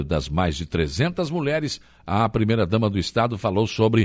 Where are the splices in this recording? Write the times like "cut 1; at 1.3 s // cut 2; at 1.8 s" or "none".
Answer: none